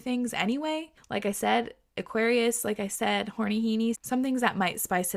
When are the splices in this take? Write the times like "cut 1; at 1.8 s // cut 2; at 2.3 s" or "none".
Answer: cut 1; at 3.9 s